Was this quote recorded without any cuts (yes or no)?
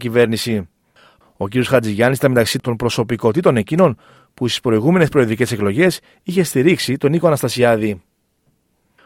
no